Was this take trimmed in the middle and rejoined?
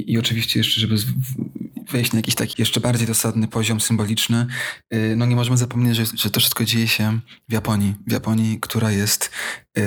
yes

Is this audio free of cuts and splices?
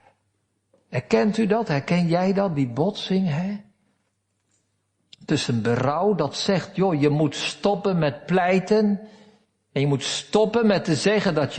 yes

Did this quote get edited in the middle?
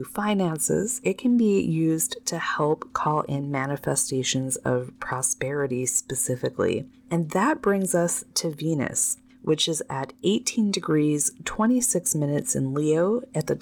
yes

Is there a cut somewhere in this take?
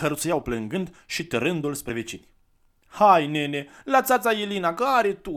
no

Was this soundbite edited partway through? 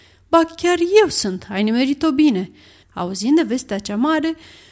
yes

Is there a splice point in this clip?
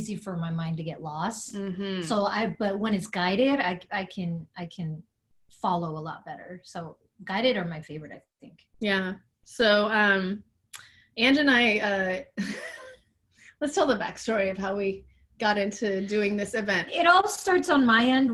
no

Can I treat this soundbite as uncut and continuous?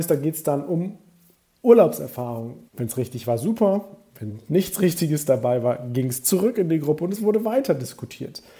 no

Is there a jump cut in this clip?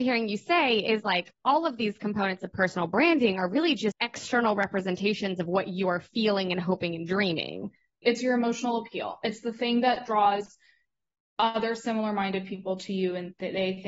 yes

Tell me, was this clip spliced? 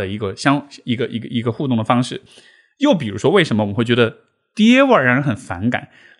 no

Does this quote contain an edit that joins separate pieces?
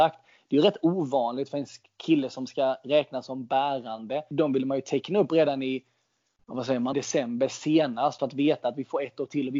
yes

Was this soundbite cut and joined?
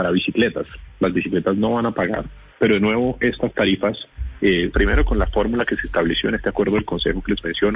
yes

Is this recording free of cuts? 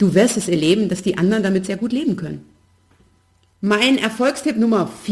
no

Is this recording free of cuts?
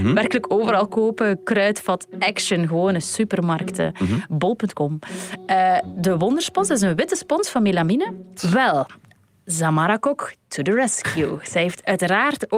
no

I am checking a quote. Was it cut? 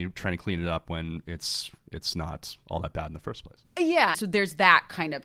yes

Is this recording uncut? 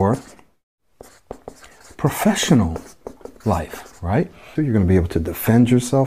no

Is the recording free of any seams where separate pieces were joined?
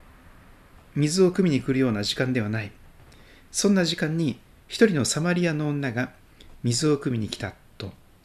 yes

